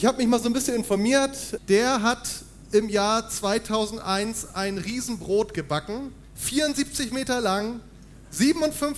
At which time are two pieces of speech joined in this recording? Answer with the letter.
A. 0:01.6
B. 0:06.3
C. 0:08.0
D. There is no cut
A